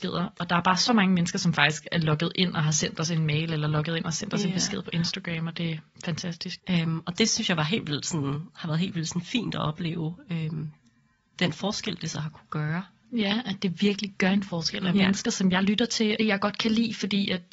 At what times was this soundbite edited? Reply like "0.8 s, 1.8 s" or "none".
6.6 s, 14.9 s, 16.2 s